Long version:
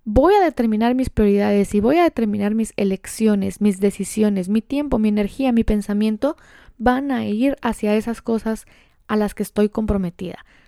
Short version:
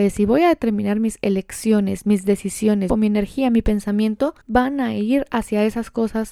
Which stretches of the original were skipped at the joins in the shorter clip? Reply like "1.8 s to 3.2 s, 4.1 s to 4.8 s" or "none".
4.4 s to 4.9 s, 6.4 s to 6.7 s